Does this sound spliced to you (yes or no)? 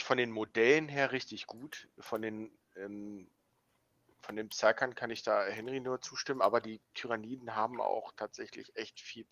no